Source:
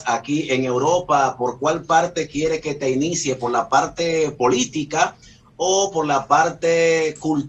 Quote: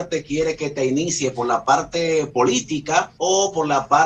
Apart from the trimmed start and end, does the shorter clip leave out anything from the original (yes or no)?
yes